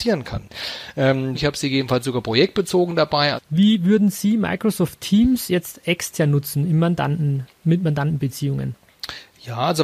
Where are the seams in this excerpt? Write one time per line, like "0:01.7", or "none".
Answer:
0:01.4
0:03.4